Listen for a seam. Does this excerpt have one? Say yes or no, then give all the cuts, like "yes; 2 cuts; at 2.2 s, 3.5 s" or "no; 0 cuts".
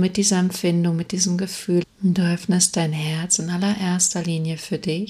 yes; 1 cut; at 1.8 s